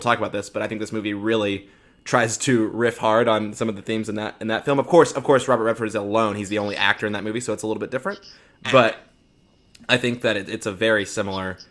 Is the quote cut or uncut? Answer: uncut